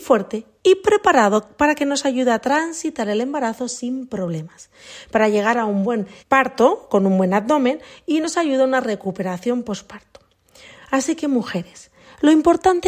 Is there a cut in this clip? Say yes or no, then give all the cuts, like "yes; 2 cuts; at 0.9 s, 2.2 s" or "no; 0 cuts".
yes; 2 cuts; at 6.2 s, 10.8 s